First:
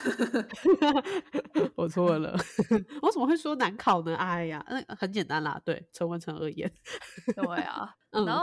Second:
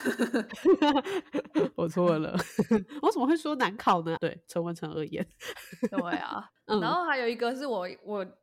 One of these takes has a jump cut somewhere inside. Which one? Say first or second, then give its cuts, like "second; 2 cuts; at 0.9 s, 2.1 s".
second; 1 cut; at 4.2 s